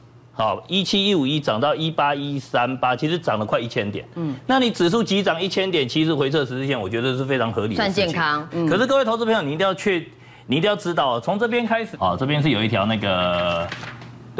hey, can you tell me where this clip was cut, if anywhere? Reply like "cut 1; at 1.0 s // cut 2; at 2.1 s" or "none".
cut 1; at 8.5 s // cut 2; at 11.9 s